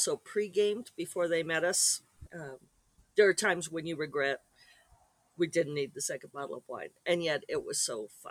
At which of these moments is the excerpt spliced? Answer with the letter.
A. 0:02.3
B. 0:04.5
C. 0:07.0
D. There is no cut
A